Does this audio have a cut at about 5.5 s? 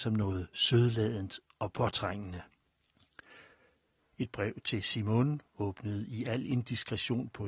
no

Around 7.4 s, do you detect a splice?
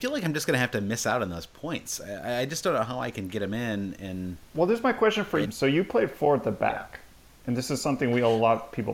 no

